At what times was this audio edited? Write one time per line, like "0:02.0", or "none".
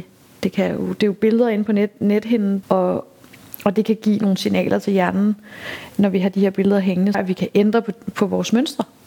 0:02.6
0:07.1